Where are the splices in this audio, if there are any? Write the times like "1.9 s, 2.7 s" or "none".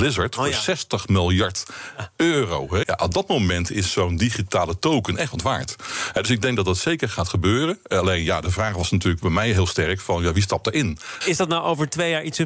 2.8 s, 11.2 s